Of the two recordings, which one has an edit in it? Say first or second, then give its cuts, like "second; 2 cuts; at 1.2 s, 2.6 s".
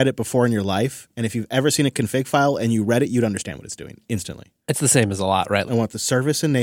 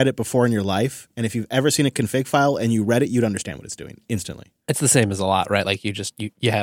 first; 1 cut; at 5.7 s